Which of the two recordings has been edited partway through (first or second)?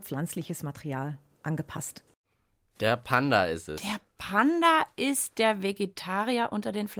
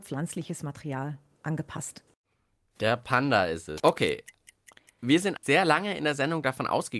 second